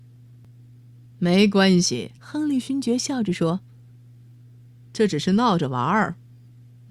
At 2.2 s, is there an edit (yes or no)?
yes